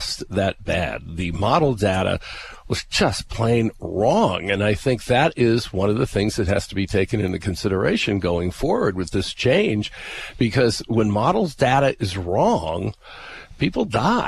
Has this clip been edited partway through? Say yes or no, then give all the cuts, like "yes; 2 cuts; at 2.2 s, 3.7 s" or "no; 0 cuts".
no; 0 cuts